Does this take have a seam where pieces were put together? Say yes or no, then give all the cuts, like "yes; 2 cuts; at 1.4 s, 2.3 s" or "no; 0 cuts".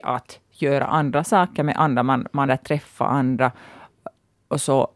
yes; 1 cut; at 2.5 s